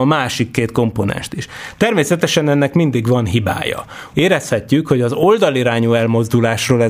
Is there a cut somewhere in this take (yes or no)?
yes